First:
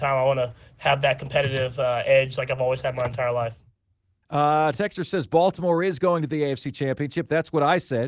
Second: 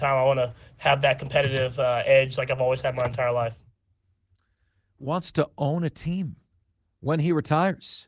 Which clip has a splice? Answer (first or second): first